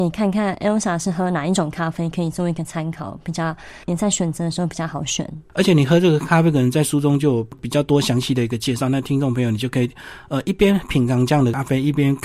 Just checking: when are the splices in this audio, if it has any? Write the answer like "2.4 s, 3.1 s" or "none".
none